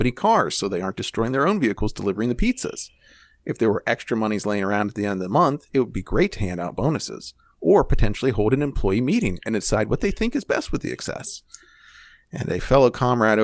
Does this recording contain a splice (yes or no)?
no